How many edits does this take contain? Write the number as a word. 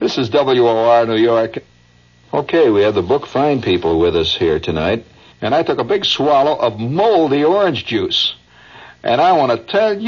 one